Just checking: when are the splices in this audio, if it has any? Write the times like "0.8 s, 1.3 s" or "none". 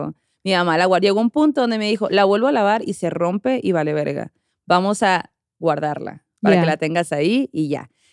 none